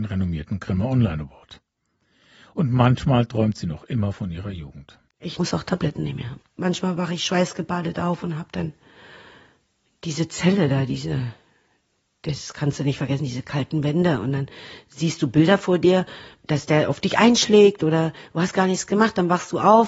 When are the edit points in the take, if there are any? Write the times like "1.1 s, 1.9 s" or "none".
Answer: 5.1 s, 6.4 s